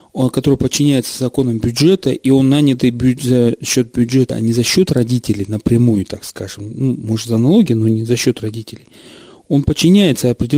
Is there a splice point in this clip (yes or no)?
no